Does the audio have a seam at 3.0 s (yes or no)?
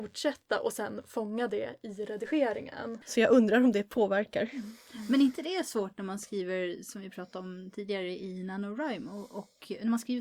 yes